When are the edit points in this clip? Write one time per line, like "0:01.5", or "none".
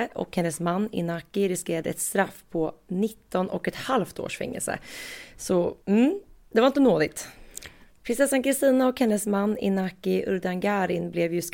0:05.8
0:07.9